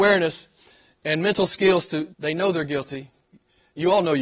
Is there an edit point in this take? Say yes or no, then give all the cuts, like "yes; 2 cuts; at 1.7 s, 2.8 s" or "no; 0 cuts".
yes; 1 cut; at 2.1 s